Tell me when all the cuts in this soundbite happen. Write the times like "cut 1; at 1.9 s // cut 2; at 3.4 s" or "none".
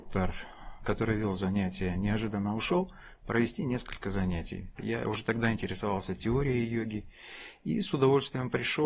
cut 1; at 4.8 s